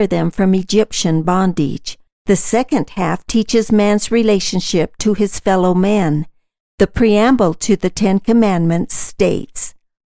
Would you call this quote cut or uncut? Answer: cut